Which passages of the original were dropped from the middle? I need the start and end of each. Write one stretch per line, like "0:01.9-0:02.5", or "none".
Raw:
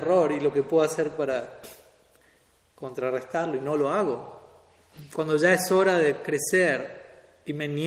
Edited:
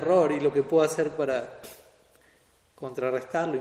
none